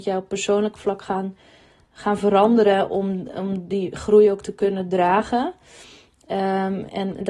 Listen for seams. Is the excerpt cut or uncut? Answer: uncut